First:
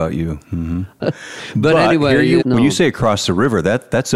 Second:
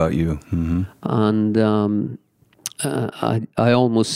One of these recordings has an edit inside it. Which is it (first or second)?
first